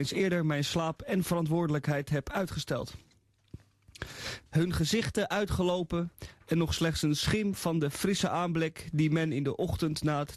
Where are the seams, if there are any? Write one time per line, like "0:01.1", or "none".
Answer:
0:04.5